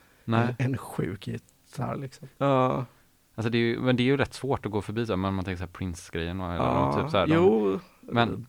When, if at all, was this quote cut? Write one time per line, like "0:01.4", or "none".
0:02.4